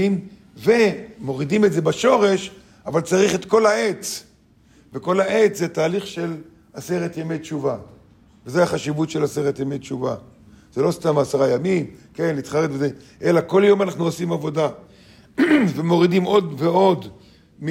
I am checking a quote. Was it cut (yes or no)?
no